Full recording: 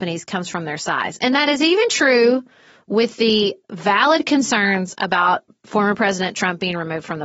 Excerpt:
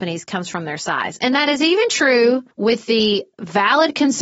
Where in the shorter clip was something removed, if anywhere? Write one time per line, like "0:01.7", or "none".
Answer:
0:02.5